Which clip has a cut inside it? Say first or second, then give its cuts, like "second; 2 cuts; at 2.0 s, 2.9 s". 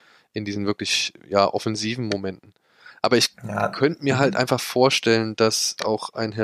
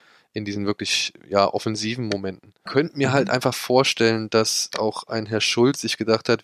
second; 1 cut; at 2.7 s